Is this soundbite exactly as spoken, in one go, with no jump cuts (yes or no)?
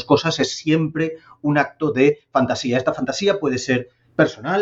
yes